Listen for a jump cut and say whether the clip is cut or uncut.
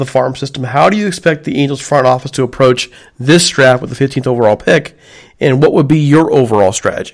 uncut